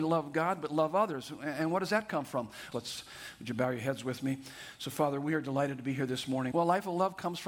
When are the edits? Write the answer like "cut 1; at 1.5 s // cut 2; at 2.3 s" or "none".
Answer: cut 1; at 2.7 s // cut 2; at 6.5 s